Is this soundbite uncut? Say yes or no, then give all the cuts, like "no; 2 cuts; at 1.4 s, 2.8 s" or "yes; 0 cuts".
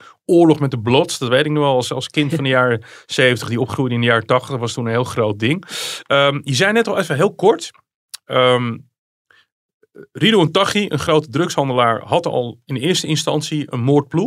yes; 0 cuts